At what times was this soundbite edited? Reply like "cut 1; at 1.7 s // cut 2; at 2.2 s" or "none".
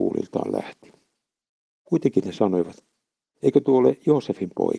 none